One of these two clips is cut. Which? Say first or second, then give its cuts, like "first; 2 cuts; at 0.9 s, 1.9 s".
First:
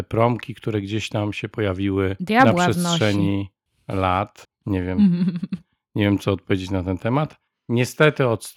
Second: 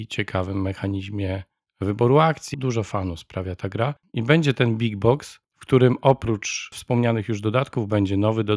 second; 1 cut; at 2.5 s